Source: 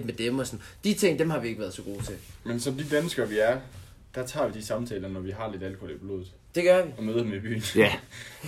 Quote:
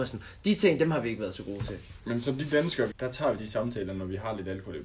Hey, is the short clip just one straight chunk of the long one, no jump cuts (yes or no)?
no